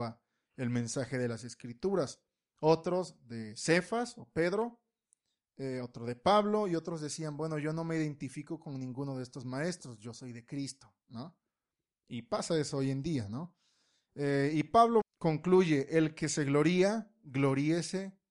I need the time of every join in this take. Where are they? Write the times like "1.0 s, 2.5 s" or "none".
15.0 s

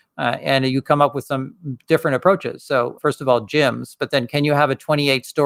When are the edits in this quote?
3.0 s

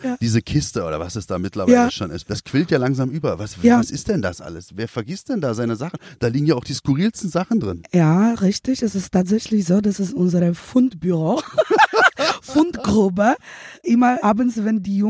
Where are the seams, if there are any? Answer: none

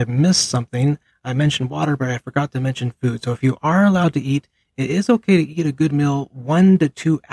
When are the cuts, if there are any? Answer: none

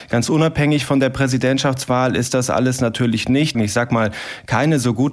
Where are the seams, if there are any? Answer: 3.5 s

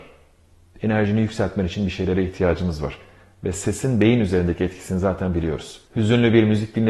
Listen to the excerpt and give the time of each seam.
5.9 s

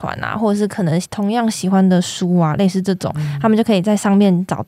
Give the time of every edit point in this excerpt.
none

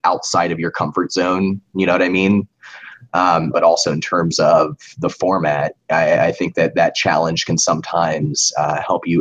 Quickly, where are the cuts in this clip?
3.5 s

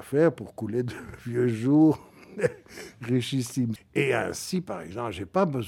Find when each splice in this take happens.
3.8 s

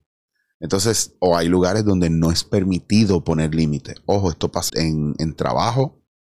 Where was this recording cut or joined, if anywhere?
4.7 s

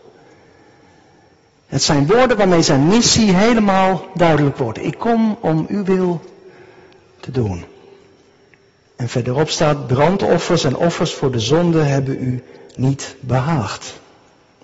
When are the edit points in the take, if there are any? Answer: 8.9 s

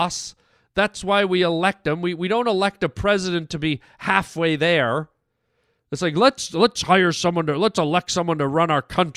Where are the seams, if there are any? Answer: none

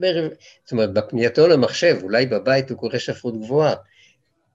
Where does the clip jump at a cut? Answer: none

